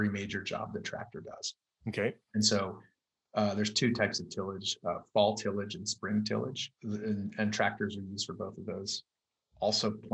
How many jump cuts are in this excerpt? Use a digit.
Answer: 1